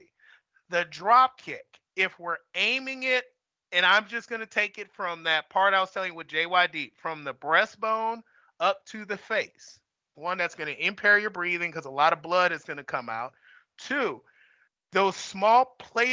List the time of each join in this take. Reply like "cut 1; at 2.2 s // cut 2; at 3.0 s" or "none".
cut 1; at 10.1 s